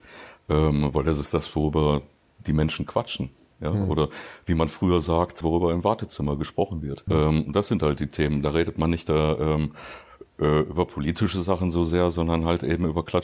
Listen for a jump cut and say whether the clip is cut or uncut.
cut